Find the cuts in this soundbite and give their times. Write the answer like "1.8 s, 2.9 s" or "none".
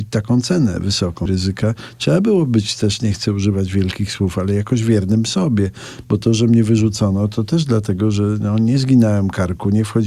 1.3 s